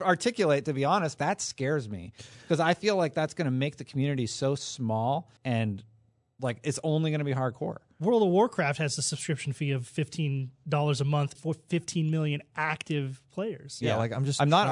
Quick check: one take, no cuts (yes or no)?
no